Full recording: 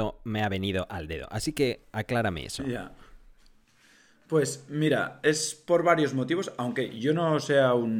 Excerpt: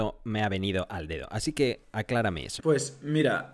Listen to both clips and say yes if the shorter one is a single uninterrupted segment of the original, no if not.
no